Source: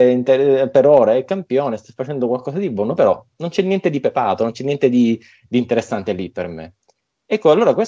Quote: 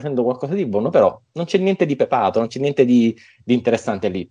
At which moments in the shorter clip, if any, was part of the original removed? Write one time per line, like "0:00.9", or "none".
none